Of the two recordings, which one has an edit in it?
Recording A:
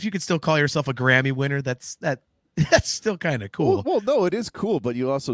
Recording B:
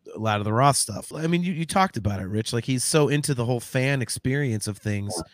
B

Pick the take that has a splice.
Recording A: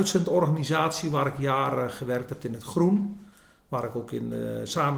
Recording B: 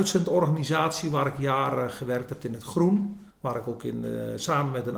B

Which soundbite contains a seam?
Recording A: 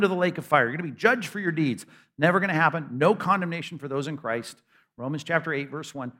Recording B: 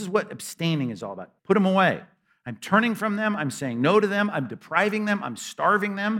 B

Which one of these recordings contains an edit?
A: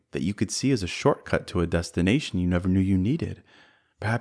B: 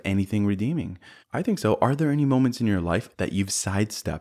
B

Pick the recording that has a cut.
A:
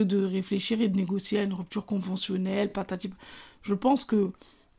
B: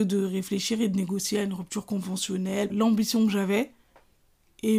B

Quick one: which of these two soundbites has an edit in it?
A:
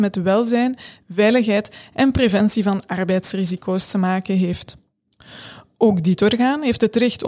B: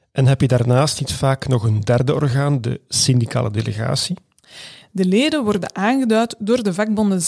B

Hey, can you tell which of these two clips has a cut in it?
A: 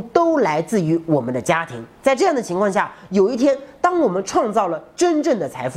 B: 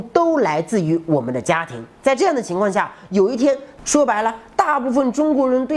B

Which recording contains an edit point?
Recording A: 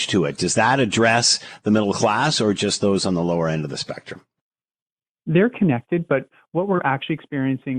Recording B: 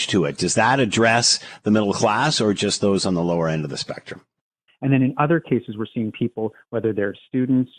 B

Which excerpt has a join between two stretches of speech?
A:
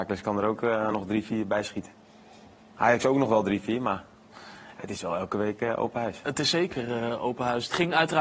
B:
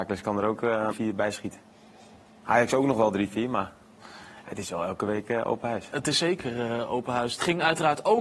B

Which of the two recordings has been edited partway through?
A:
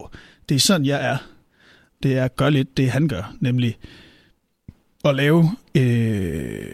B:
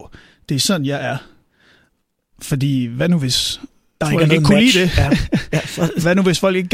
A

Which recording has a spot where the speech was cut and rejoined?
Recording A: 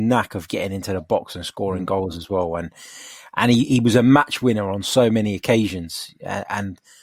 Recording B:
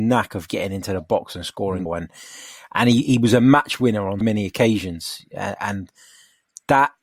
B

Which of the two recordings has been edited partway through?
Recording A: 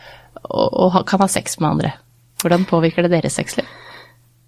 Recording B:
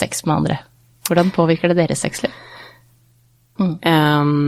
B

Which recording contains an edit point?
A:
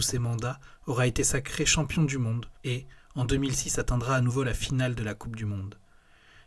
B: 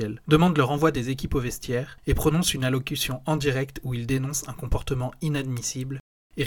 A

